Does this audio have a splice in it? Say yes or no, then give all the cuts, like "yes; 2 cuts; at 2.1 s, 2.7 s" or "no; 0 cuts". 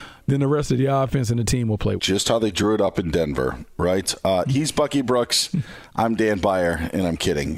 yes; 1 cut; at 2.0 s